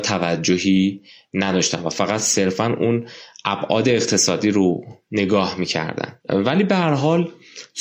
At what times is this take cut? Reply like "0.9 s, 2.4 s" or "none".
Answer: 6.2 s